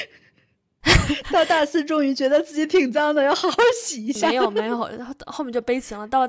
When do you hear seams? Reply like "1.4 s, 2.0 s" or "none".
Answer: none